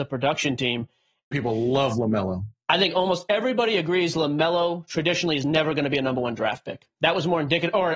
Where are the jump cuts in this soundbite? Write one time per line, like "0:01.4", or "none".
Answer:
0:01.3